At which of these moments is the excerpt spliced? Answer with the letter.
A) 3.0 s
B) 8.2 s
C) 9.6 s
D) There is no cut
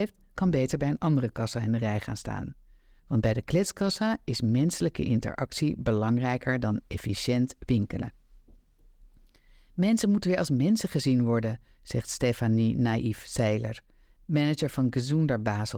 A